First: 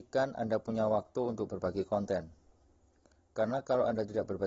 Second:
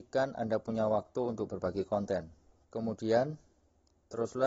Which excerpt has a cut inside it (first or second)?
second